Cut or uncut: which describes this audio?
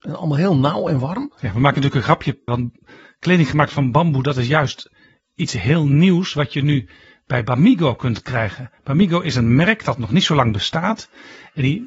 cut